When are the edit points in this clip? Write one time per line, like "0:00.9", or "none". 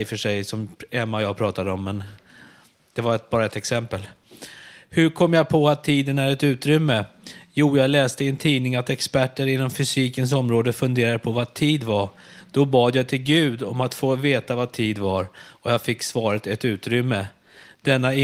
none